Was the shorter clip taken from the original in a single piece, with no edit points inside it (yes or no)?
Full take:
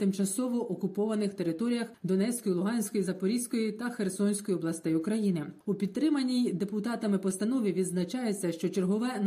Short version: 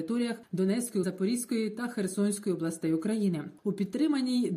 no